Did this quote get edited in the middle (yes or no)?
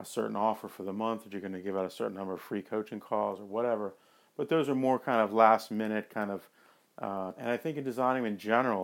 yes